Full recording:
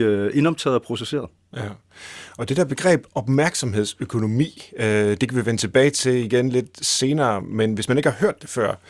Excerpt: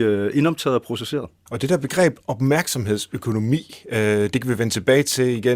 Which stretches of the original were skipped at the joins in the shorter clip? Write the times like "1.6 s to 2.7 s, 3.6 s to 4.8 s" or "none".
1.5 s to 2.3 s